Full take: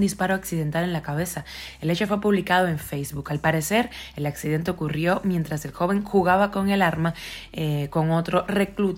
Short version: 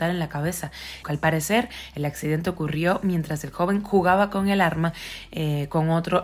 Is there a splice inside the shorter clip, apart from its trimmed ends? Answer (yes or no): yes